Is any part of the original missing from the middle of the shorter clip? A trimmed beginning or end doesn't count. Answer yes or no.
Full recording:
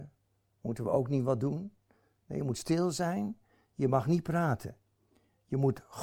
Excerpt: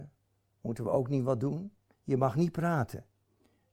yes